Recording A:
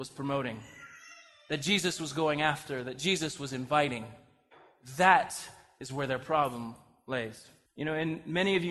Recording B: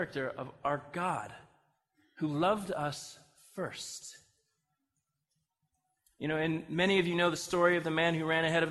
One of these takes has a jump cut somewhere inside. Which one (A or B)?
A